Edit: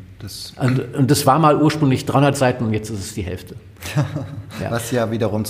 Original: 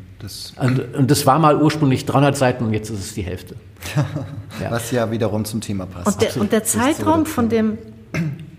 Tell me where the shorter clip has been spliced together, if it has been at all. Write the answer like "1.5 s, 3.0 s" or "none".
none